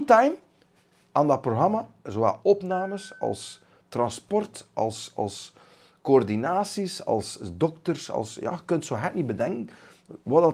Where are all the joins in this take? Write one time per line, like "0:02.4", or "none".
none